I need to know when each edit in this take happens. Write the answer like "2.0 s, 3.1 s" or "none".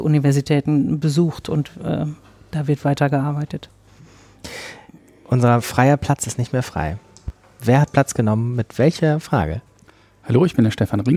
none